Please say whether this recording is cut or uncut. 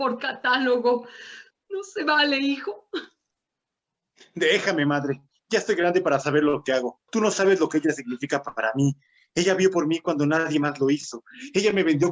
cut